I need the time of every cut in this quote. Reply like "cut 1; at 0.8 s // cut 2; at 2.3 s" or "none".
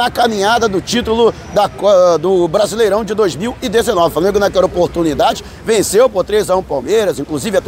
none